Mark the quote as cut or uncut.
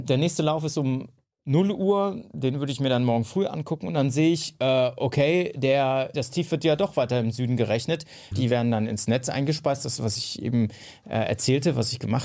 cut